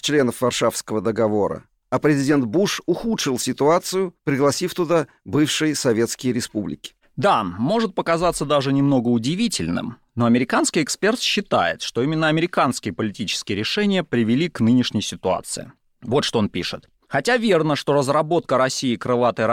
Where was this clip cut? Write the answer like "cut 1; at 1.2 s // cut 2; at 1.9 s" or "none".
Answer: none

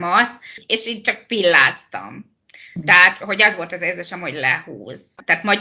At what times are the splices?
cut 1; at 3.2 s

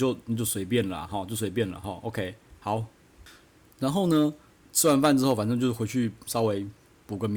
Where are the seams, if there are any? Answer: cut 1; at 4.6 s

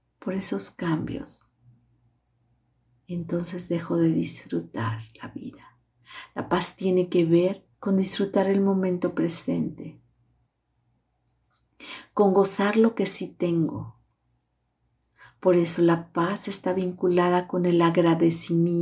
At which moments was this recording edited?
cut 1; at 7.7 s

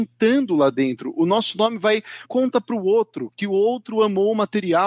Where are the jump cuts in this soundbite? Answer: cut 1; at 2.2 s

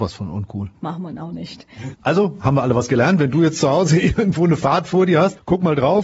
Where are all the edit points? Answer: cut 1; at 1.9 s

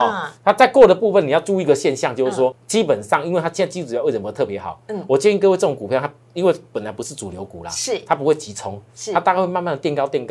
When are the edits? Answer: cut 1; at 2.5 s

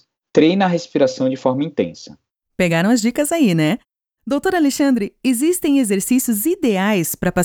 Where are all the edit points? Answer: cut 1; at 2.4 s

